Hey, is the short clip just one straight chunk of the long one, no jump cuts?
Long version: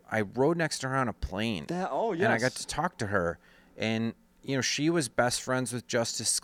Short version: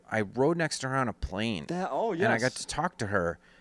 yes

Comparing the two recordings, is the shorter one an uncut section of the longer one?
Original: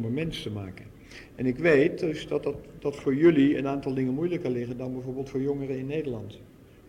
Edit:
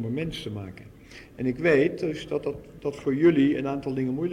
yes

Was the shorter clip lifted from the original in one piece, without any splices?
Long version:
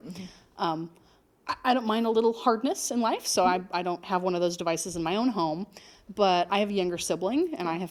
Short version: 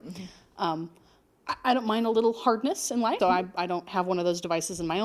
no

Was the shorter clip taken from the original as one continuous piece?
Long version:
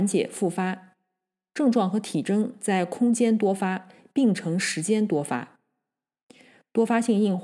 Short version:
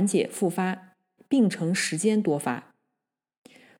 no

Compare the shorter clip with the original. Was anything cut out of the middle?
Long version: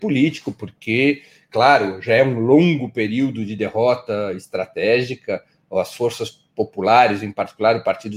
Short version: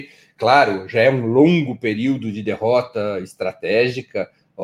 no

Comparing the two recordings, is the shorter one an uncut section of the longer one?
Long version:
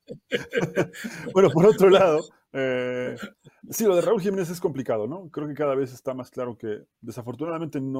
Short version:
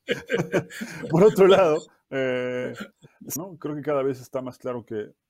no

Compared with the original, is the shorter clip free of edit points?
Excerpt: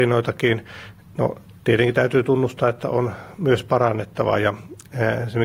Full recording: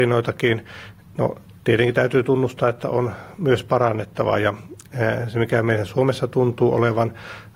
yes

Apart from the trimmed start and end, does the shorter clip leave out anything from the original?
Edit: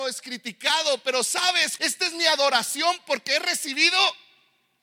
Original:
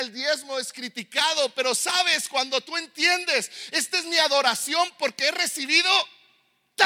yes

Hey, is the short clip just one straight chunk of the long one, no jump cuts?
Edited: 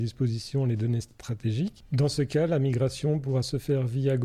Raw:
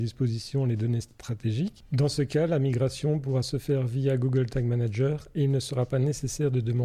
yes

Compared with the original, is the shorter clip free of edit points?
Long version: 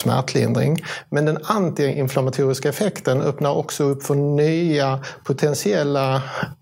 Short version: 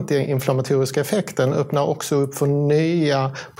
yes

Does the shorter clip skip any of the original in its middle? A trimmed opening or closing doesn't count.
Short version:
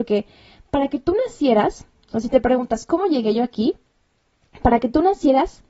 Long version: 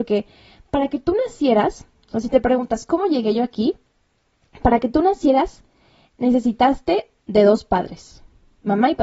no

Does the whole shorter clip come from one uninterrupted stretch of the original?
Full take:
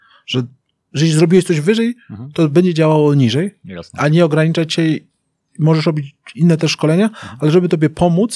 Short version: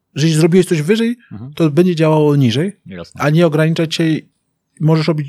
yes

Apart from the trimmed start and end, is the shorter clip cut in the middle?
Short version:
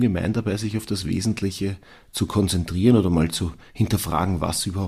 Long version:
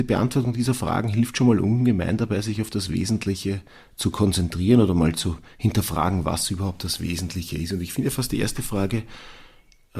no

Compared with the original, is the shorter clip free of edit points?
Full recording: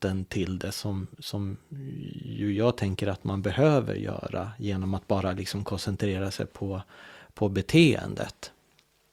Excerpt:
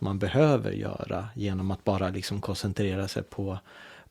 yes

